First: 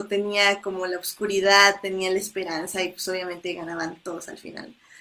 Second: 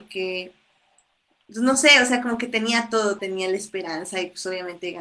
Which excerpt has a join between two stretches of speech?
second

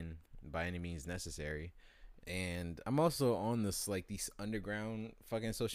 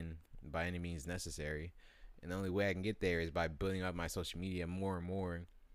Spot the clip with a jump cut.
first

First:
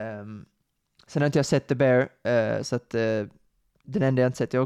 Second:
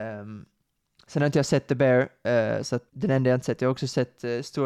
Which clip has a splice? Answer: second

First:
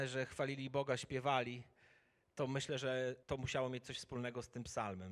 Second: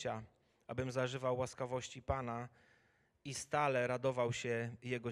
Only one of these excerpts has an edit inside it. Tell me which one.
first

